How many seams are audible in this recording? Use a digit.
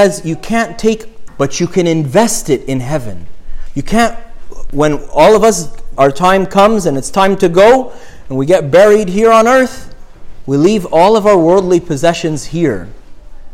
2